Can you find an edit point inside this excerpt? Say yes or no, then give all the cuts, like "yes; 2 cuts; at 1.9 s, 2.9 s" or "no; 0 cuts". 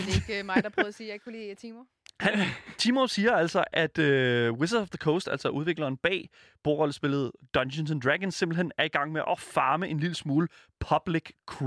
no; 0 cuts